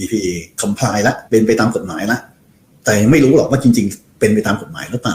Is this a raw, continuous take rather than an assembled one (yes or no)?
no